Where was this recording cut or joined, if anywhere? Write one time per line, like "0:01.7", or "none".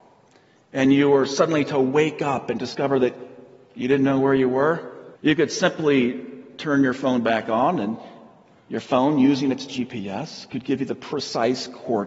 0:05.1